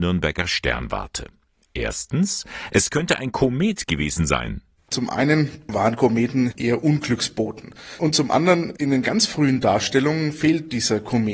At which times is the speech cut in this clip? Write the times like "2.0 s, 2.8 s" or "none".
4.8 s

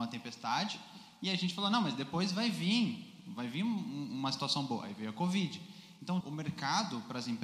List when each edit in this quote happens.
6.2 s

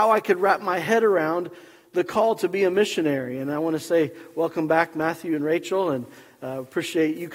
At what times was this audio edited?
none

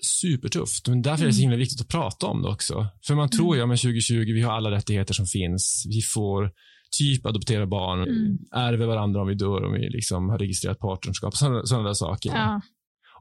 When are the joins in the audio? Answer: 8.0 s, 12.3 s

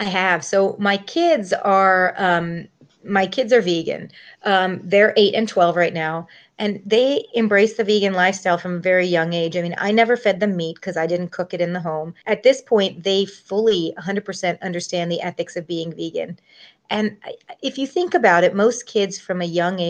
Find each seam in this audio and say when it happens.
12.2 s

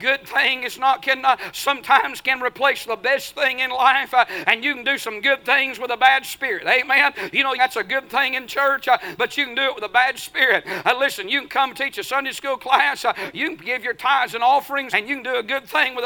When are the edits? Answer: 7.6 s, 14.9 s

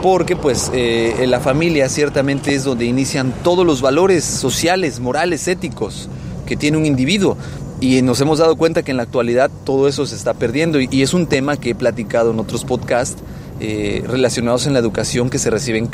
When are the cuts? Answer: none

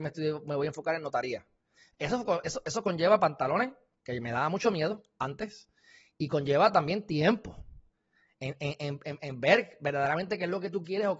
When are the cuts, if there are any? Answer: 2.6 s

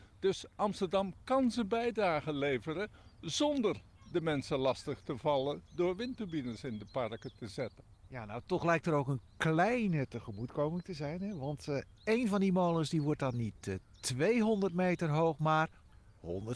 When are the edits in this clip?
none

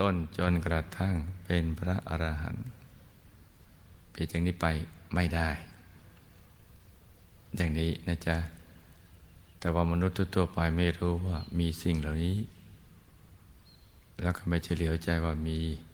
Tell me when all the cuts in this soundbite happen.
4.0 s

